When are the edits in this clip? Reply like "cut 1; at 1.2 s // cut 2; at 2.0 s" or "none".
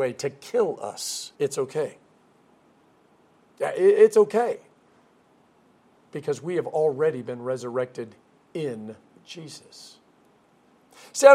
cut 1; at 1.3 s